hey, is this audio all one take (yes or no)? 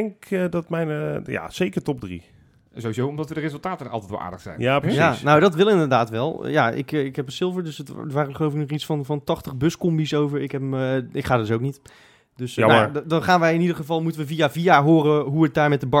yes